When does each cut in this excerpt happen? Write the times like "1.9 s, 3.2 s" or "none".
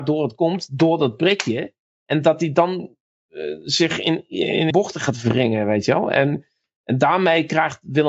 4.7 s